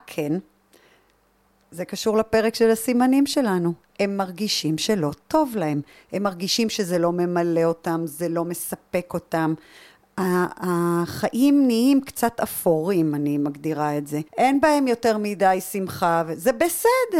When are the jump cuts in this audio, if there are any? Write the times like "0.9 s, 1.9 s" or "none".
14.3 s